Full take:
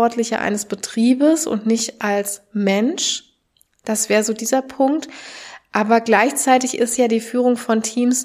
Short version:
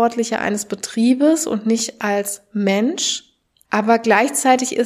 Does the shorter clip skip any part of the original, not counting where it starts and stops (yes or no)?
yes